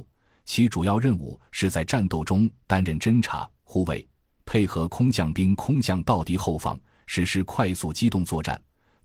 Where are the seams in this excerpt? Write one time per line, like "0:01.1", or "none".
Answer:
none